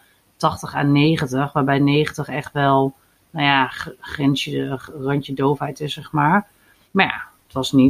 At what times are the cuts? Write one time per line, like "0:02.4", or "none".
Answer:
0:06.9